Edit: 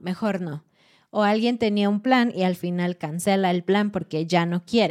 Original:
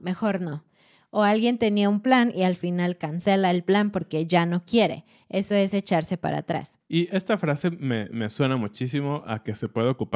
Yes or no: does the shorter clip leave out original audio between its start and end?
no